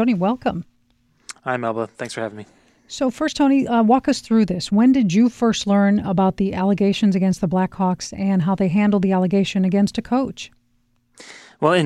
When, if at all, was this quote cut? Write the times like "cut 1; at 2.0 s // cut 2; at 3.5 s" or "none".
none

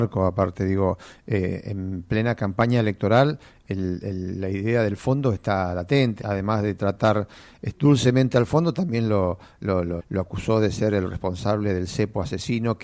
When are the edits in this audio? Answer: cut 1; at 6.2 s // cut 2; at 10.0 s

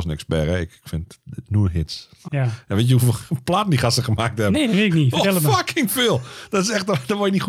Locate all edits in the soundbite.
cut 1; at 2.3 s

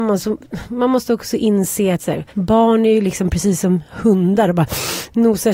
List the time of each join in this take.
cut 1; at 2.3 s

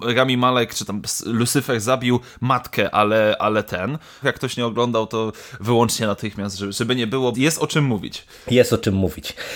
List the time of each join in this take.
cut 1; at 4.2 s // cut 2; at 7.3 s

